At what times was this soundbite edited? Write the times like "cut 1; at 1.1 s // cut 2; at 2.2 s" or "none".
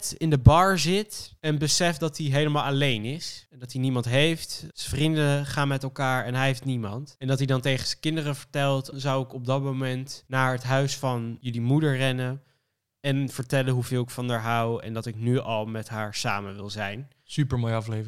cut 1; at 8.9 s